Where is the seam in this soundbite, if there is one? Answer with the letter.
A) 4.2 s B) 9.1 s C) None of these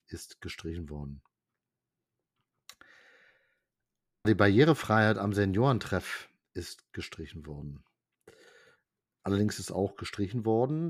A